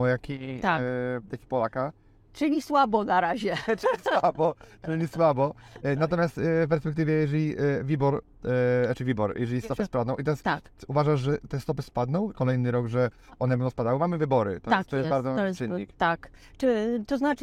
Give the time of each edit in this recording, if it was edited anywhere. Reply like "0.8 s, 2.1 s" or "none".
12.3 s